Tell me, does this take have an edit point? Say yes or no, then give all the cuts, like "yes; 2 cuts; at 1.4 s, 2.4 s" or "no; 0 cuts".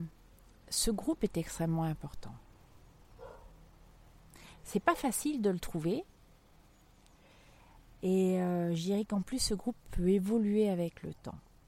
no; 0 cuts